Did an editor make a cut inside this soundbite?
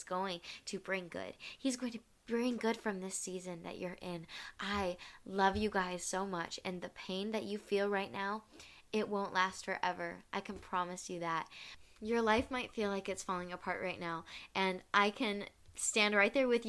no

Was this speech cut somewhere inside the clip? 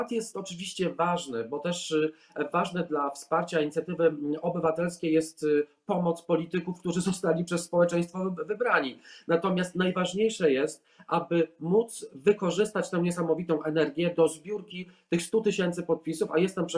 no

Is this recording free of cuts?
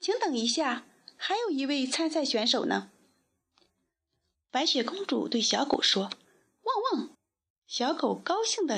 no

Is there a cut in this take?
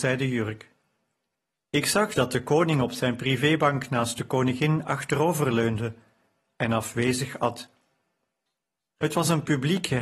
yes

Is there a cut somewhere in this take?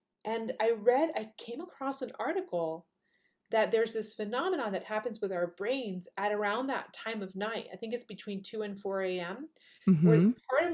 no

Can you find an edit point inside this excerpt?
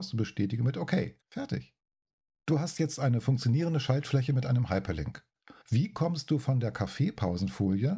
yes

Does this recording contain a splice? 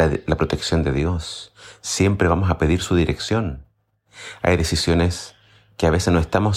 yes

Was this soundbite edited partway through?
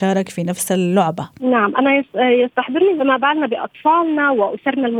yes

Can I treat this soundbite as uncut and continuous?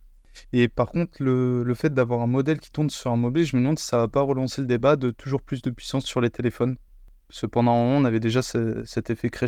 yes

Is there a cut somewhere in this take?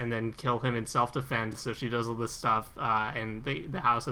no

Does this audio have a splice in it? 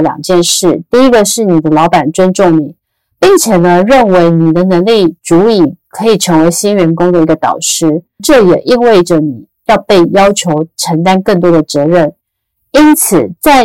yes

